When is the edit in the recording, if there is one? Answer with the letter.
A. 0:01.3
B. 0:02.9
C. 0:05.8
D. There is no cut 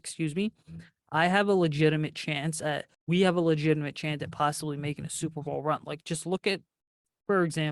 B